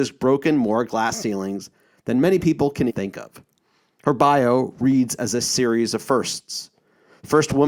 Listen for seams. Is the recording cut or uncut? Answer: cut